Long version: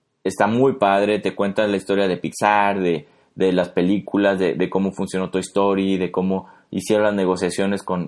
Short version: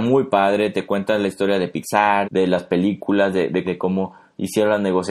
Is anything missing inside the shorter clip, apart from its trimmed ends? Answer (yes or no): yes